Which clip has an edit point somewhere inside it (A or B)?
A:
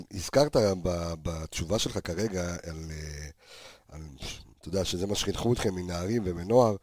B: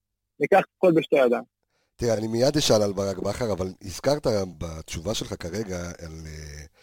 B